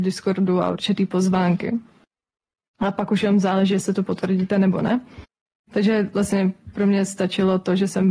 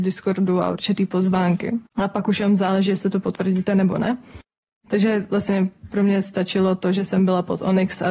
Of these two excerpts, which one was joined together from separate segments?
second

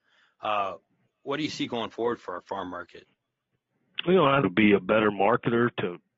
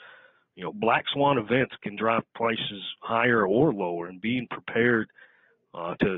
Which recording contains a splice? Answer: first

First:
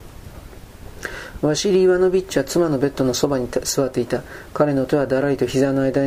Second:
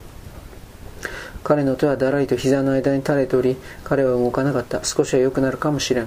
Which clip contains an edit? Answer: second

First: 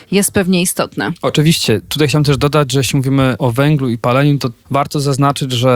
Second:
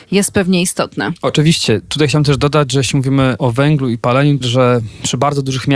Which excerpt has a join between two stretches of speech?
second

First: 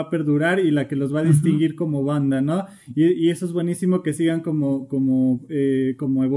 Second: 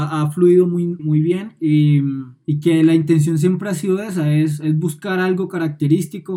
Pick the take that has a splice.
second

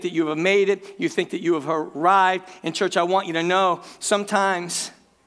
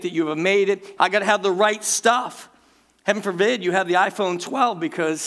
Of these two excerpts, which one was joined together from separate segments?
second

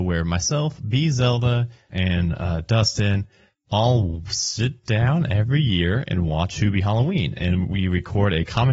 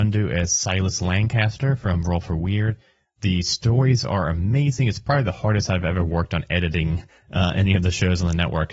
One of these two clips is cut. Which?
first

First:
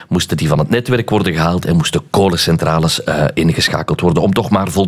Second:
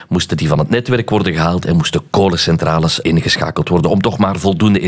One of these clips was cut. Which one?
second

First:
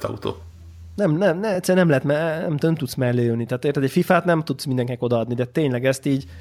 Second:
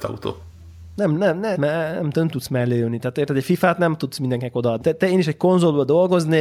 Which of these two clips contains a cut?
second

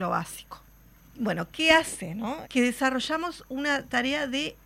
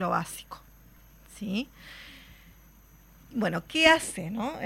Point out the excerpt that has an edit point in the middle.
first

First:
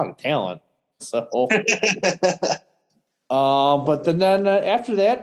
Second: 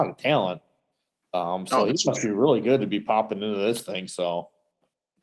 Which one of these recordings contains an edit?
first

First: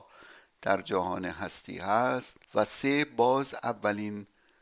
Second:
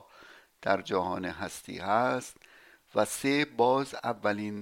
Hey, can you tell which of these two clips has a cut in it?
first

